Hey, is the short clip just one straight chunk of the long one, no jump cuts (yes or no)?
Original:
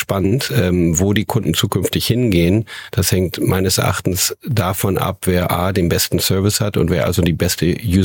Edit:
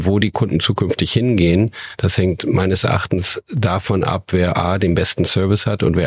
yes